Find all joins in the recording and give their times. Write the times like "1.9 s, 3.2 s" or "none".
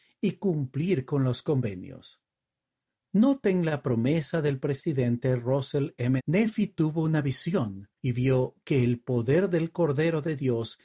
6.2 s, 8.0 s